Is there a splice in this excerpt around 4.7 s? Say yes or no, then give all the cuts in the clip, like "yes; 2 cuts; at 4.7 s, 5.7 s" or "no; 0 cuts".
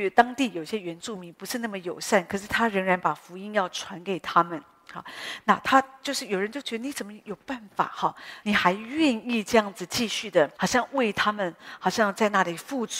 no; 2 cuts; at 8.4 s, 10.6 s